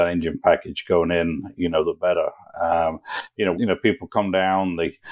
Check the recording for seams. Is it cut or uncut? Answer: cut